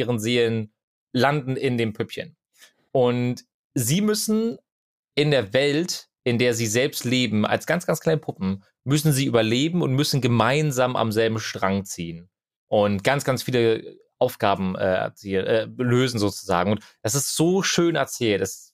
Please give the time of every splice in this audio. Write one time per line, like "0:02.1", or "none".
none